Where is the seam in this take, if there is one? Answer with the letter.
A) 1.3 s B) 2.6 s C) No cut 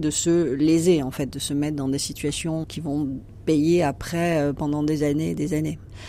B